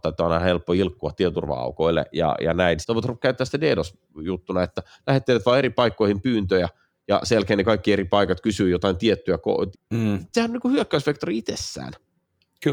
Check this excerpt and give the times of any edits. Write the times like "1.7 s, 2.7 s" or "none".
2.8 s, 9.7 s